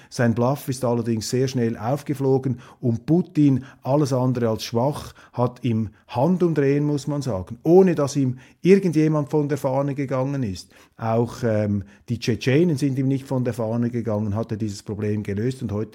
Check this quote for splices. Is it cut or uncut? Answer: uncut